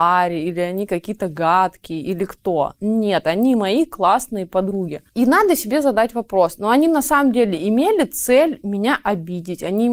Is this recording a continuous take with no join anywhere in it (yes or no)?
yes